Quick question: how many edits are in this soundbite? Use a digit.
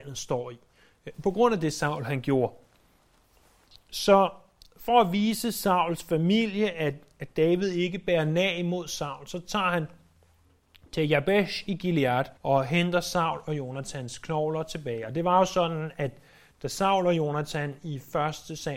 1